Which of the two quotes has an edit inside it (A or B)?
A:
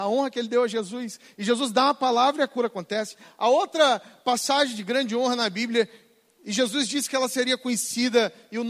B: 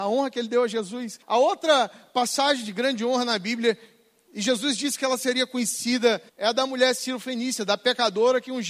B